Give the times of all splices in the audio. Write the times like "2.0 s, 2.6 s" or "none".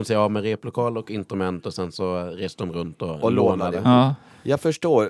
none